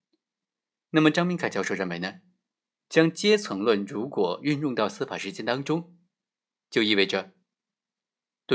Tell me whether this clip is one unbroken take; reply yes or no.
yes